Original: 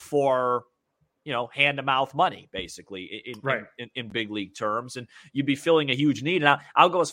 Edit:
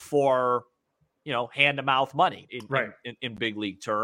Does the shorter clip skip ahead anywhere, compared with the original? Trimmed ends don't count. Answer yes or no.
yes